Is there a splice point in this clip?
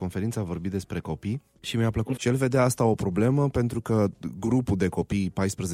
yes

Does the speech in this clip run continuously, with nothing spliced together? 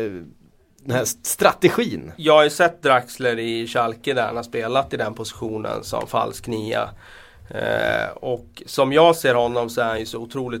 yes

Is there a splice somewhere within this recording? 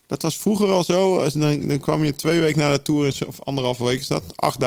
no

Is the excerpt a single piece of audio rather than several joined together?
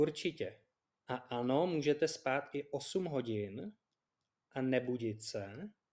no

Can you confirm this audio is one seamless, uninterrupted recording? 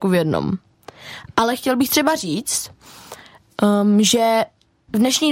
yes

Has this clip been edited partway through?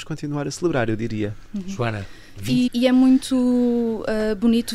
yes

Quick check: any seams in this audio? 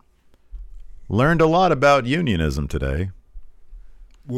no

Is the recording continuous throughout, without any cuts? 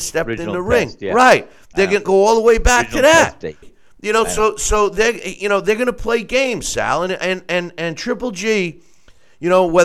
no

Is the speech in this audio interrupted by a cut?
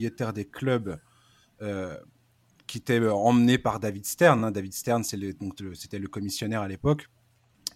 no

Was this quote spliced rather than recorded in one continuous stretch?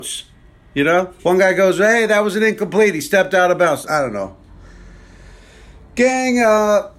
yes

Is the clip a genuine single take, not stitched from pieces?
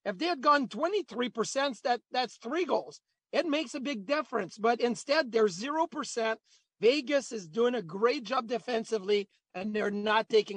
yes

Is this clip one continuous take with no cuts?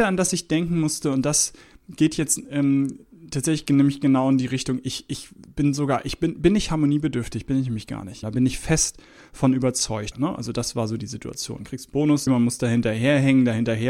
no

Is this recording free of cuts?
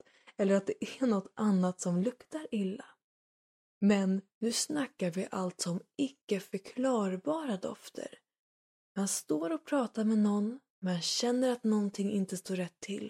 yes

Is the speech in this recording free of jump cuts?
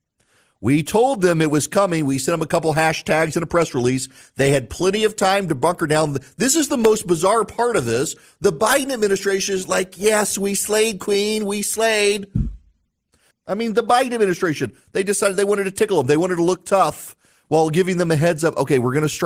no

